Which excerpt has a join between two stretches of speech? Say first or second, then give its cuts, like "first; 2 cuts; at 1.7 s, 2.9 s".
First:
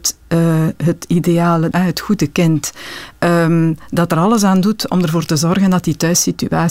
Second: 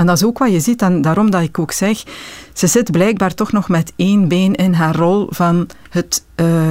first; 1 cut; at 1.7 s